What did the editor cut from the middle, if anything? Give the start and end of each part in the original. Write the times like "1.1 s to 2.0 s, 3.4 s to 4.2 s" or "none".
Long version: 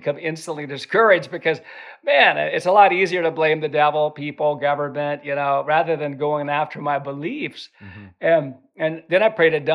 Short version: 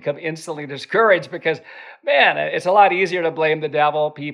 none